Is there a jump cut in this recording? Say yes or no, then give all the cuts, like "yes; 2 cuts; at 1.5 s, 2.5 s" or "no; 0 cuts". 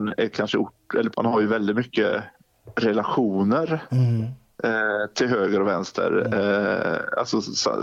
yes; 1 cut; at 1.1 s